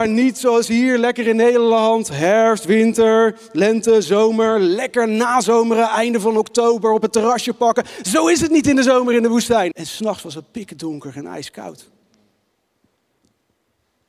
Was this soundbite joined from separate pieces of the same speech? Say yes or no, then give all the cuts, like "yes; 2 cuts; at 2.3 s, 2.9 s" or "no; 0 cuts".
yes; 1 cut; at 9.7 s